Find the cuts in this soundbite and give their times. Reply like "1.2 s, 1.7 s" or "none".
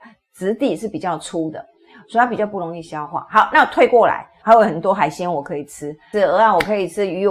4.4 s, 6.1 s